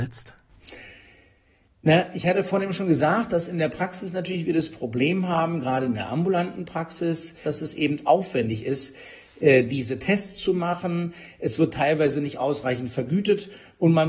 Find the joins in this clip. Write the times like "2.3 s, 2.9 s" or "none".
7.4 s